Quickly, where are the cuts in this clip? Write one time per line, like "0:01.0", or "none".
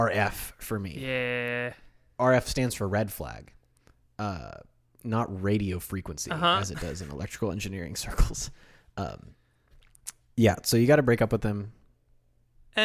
none